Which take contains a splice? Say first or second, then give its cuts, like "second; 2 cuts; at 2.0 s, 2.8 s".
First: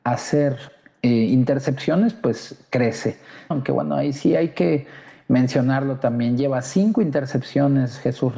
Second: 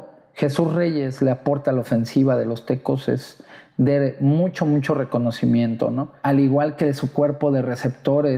first; 1 cut; at 3.5 s